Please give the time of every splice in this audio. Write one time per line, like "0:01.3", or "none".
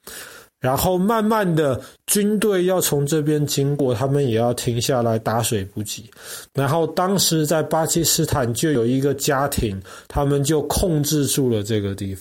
none